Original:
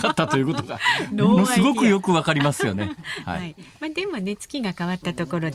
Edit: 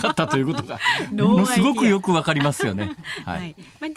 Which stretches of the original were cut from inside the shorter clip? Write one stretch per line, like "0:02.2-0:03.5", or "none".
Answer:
none